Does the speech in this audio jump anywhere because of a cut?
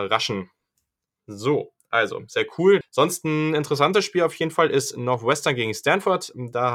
yes; 1 cut; at 2.8 s

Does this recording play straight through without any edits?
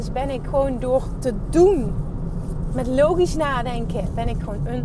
yes; 0 cuts

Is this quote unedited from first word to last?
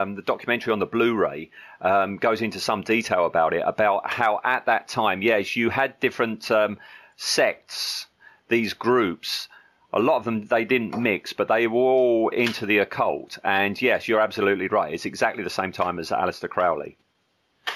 yes; 0 cuts

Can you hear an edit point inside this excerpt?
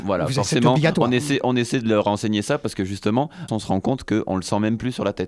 yes; 1 cut; at 3.5 s

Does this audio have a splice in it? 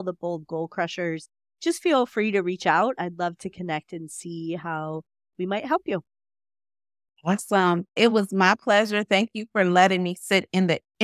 no; 0 cuts

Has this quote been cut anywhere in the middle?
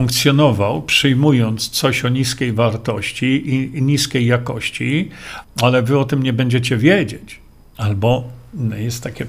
yes; 2 cuts; at 5.4 s, 7.7 s

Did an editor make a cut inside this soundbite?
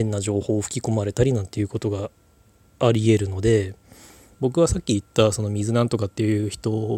yes; 1 cut; at 4.3 s

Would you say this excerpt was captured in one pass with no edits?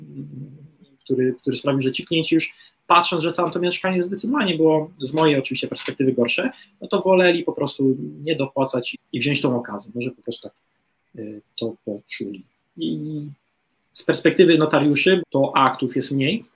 no; 2 cuts; at 8.9 s, 15.2 s

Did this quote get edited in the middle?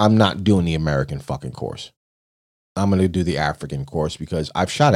no; 0 cuts

